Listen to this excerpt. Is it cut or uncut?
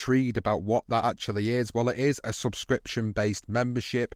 uncut